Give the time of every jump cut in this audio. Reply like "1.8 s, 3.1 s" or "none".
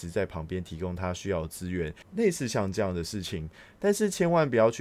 2.0 s